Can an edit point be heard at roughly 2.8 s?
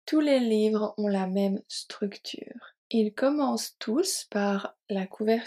yes; 1 cut; at 2.8 s

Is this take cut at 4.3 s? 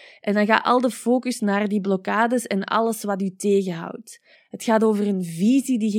yes; 1 cut; at 4.3 s

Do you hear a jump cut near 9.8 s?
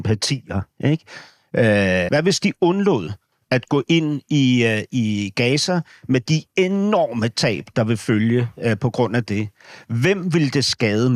no; 1 cut; at 2.1 s

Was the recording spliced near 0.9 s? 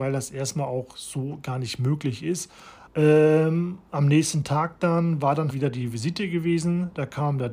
no; 2 cuts; at 2.9 s, 5.5 s

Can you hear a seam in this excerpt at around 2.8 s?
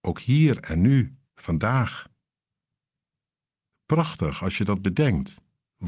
no; 0 cuts

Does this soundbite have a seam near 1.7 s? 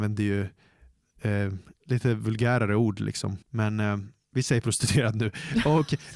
no; 1 cut; at 3.4 s

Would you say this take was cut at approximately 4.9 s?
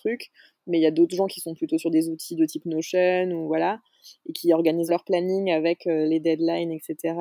yes; 1 cut; at 4.9 s

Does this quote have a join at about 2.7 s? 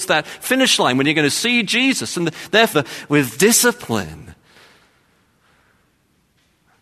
yes; 1 cut; at 2.7 s

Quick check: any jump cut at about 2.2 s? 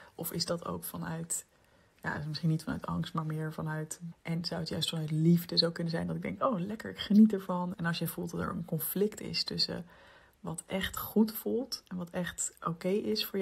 no; 2 cuts; at 4.1 s, 7.7 s

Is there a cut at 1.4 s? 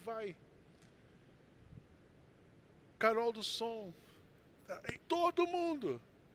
no; 2 cuts; at 3.0 s, 5.0 s

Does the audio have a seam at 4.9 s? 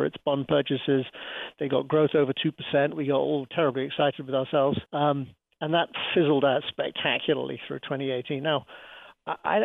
yes; 1 cut; at 4.9 s

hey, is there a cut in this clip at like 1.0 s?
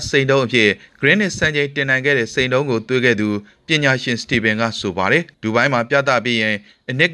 no; 1 cut; at 5.3 s

